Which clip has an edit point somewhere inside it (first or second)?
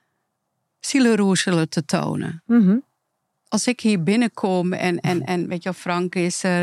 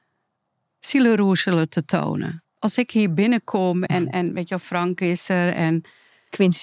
second